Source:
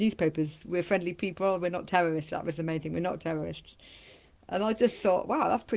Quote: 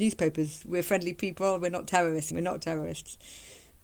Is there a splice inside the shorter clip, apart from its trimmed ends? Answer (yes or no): yes